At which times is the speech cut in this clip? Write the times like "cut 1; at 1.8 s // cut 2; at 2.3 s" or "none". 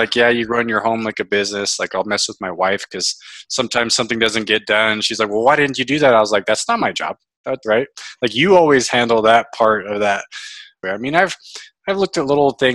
cut 1; at 7.6 s // cut 2; at 10.8 s